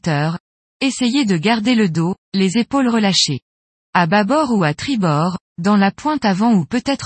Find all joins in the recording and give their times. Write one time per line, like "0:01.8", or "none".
0:02.2
0:03.8